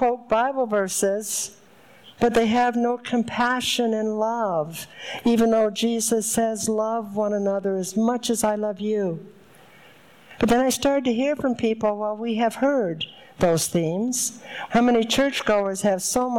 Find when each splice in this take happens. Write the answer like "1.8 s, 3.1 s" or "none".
10.4 s, 14.7 s